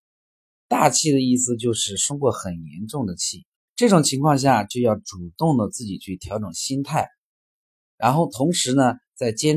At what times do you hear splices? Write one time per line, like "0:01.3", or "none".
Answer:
0:03.7